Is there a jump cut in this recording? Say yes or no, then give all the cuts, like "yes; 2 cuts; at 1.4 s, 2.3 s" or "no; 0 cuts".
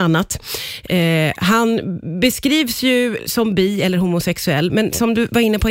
yes; 1 cut; at 3.2 s